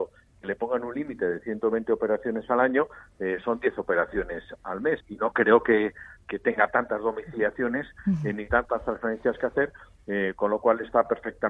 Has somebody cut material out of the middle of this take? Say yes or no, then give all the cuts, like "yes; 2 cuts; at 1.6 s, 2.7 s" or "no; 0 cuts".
yes; 1 cut; at 5.0 s